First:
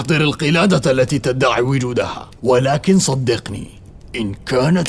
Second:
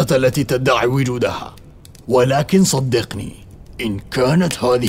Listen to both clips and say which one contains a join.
first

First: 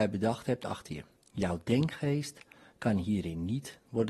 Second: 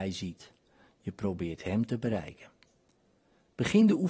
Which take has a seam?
first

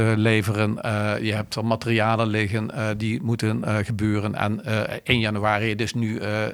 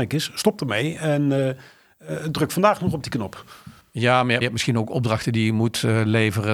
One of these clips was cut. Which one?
second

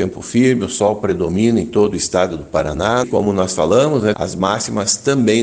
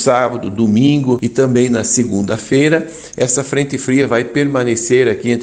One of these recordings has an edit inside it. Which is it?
first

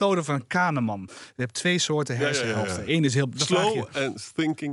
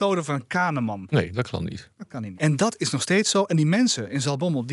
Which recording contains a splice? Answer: second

